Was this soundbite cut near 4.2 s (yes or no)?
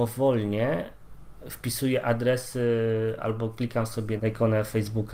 yes